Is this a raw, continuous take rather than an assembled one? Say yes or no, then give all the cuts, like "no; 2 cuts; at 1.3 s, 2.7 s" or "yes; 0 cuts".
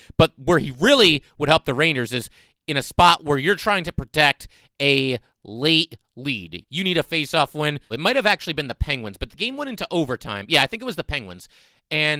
no; 2 cuts; at 6.6 s, 7.9 s